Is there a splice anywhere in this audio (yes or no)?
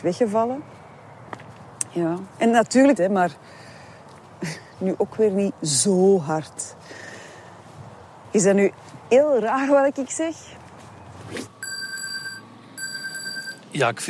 yes